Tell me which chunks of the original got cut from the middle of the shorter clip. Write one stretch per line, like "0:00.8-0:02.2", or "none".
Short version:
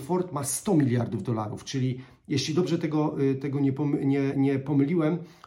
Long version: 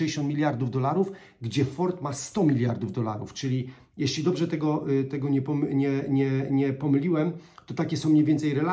0:06.0-0:06.5